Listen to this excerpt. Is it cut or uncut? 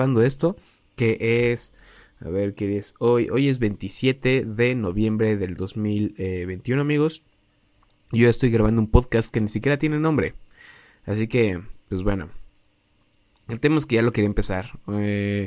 uncut